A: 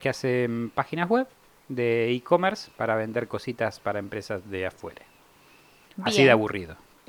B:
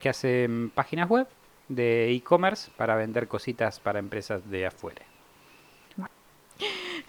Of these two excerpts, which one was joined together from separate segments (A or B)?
B